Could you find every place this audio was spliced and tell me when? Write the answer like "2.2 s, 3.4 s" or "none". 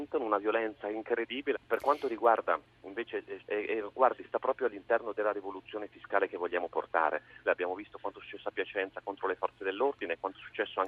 1.5 s, 3.4 s, 7.5 s